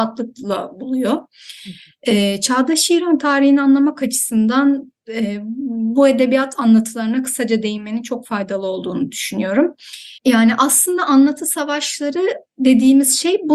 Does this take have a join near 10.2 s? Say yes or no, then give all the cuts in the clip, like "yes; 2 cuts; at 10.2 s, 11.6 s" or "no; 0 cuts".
yes; 1 cut; at 10.2 s